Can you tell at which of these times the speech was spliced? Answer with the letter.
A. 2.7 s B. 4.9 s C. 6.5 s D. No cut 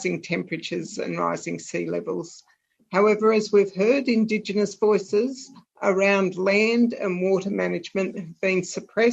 D